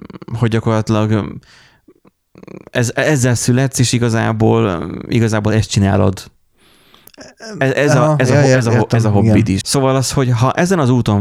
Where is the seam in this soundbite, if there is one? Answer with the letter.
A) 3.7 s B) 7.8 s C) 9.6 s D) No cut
C